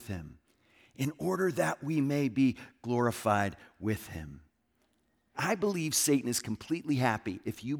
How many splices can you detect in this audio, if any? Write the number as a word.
one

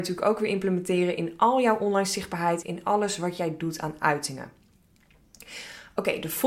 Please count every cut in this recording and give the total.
one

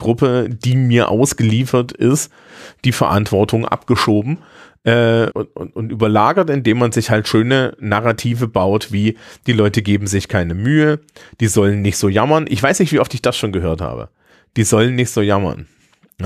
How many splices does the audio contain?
one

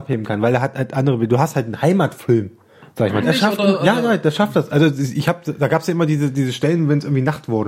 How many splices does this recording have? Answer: one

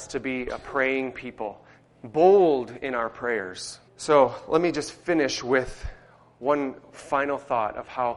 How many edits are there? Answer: two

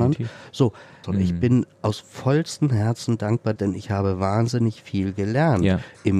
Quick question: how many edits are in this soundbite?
two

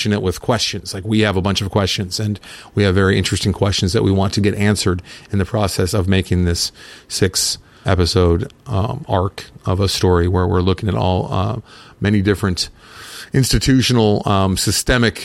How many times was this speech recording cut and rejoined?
one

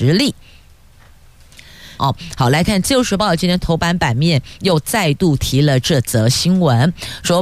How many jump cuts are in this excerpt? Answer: one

